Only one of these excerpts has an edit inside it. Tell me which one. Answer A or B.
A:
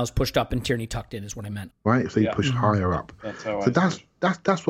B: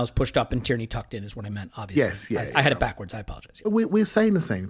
A